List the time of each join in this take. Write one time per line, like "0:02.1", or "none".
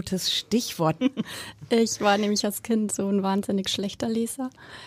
0:01.0